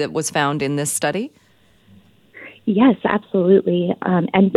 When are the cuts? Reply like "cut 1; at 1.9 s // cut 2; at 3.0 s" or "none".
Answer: none